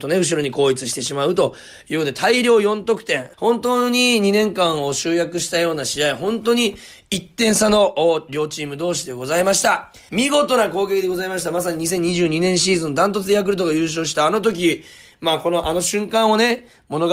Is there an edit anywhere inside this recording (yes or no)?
yes